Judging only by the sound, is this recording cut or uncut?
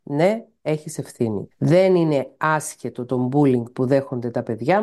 cut